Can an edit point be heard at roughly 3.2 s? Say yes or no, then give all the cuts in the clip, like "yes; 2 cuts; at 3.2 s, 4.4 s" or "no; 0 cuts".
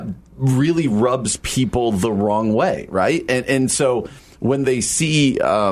no; 0 cuts